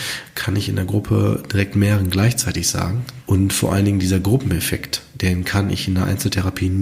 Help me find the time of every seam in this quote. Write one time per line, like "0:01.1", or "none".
0:03.2

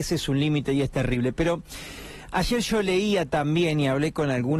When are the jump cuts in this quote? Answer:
none

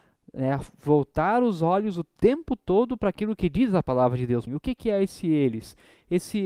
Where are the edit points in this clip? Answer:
0:04.5

